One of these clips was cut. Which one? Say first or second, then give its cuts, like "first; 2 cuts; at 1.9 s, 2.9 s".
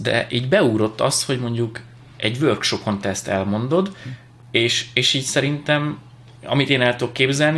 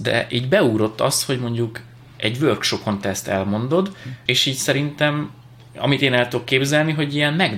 second; 1 cut; at 4.3 s